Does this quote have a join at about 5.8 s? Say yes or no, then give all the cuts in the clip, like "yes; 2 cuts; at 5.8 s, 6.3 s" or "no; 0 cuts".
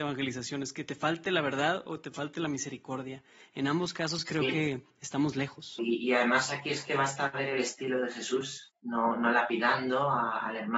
yes; 2 cuts; at 5.8 s, 8.7 s